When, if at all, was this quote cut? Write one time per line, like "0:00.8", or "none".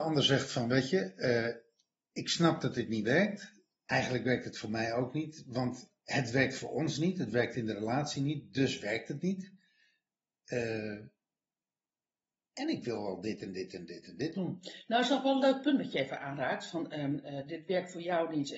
0:10.3